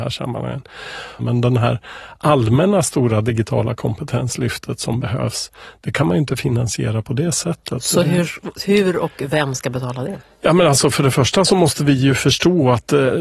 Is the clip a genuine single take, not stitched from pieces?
no; 1 cut; at 1.2 s

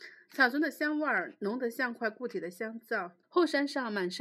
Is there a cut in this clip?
yes; 1 cut; at 3.2 s

